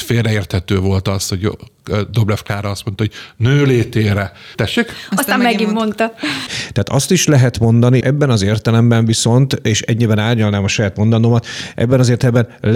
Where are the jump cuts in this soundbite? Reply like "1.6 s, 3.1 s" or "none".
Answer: 4.5 s, 6.5 s, 8.0 s